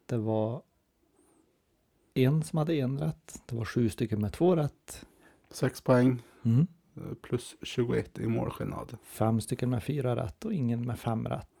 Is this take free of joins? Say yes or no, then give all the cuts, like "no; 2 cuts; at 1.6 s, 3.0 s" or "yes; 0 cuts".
no; 2 cuts; at 5.4 s, 9.0 s